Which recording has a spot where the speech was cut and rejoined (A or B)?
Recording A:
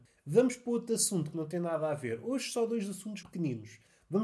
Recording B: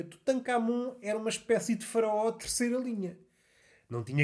A